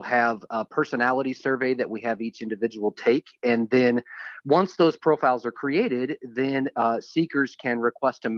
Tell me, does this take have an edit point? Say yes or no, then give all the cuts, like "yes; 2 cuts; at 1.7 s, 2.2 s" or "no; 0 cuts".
no; 0 cuts